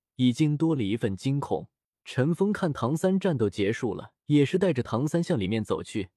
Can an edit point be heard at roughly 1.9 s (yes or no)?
yes